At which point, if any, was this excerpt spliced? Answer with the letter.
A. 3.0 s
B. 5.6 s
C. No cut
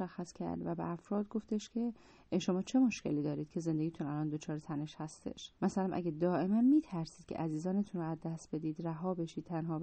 B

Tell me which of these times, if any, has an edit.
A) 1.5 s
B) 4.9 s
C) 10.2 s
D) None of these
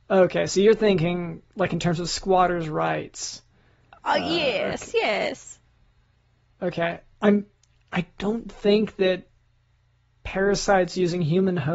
D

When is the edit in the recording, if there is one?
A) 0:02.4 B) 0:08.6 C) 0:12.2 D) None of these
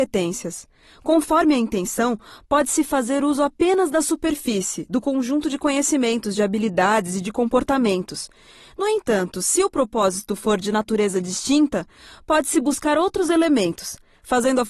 D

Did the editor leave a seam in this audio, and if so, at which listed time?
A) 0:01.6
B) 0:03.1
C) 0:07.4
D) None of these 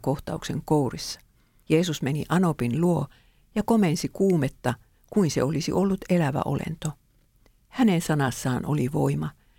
A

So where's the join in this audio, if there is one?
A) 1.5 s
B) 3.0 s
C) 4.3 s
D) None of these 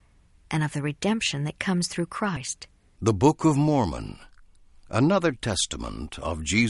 B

